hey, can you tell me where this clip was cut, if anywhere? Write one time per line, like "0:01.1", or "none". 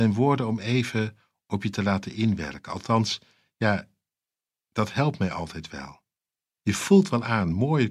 0:06.6